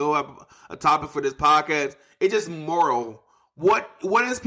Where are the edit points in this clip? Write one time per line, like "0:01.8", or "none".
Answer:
none